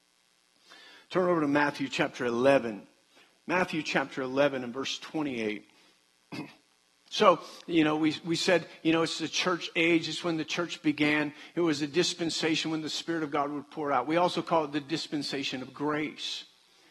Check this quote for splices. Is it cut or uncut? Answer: cut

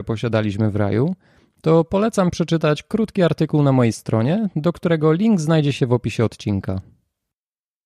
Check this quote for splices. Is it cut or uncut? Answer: uncut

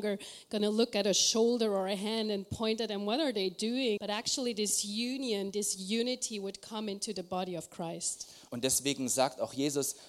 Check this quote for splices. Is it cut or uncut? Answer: cut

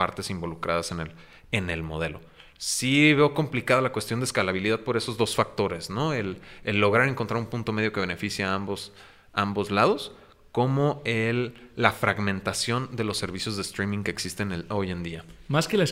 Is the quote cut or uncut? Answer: uncut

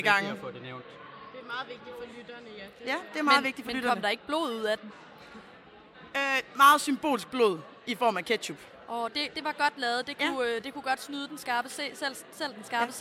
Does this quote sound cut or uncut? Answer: uncut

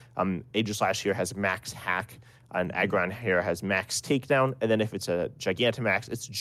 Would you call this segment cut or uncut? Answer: uncut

